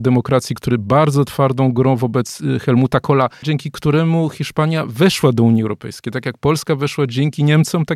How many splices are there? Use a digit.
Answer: 1